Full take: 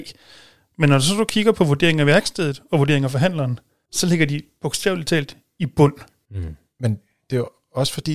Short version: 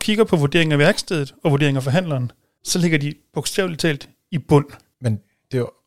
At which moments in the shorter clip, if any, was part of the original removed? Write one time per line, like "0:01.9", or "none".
0:04.9